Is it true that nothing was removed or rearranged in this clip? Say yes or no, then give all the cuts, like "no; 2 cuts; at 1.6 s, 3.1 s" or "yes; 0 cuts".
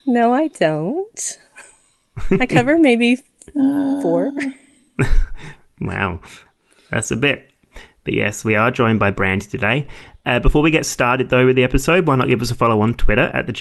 yes; 0 cuts